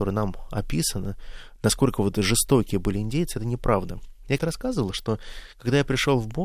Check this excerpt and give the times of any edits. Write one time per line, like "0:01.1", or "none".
0:04.4